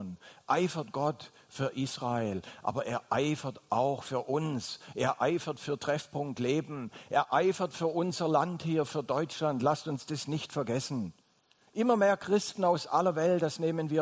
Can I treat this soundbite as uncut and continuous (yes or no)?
yes